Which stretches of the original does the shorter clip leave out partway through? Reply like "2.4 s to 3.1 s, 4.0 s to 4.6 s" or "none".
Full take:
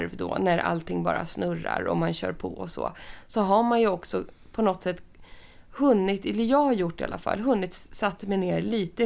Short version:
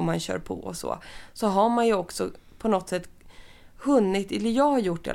none